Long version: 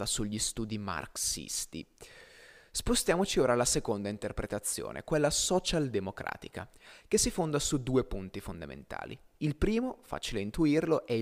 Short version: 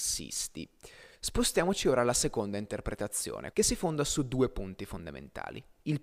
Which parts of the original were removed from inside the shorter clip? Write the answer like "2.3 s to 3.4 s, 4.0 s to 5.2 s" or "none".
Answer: 2.3 s to 2.7 s, 5.0 s to 7.1 s